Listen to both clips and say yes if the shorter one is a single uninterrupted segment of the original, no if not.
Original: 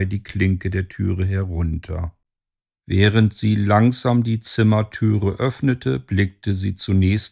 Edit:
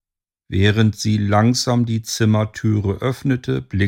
yes